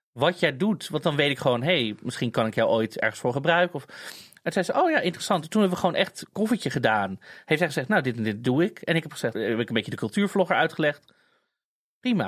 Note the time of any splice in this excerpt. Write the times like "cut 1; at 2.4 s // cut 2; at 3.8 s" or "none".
cut 1; at 9.3 s